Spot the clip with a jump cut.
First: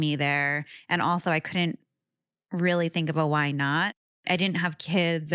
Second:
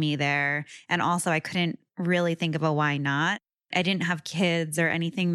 second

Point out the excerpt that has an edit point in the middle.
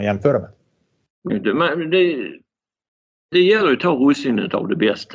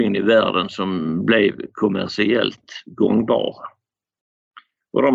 first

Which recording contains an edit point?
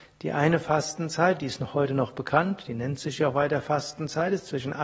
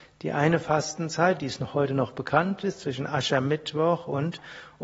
second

